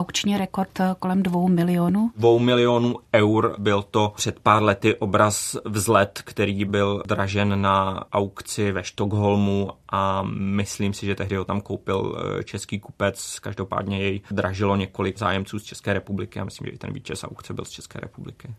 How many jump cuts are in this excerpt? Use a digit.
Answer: 0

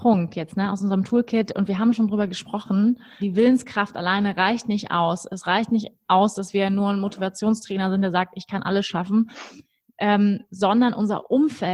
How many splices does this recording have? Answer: 1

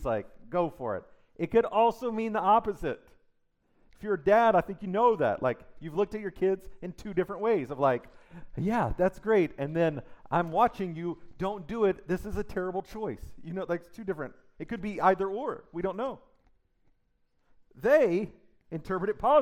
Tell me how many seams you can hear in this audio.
0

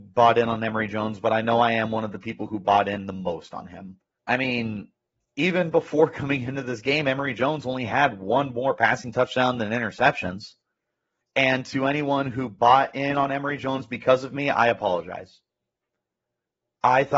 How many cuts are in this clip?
2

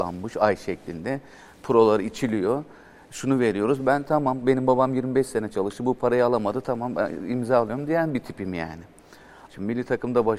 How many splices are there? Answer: 1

